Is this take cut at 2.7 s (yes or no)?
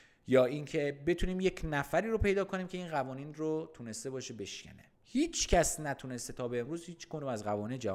no